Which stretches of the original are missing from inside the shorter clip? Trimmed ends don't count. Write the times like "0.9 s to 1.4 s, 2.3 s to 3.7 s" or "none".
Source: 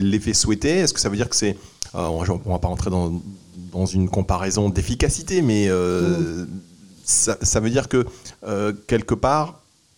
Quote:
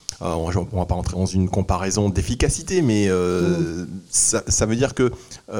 2.8 s to 3.7 s, 6.7 s to 7.0 s